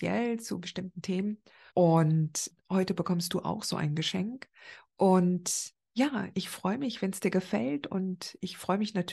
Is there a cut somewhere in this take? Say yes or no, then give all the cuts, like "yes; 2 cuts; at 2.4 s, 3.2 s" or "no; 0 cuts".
yes; 2 cuts; at 1.7 s, 6.3 s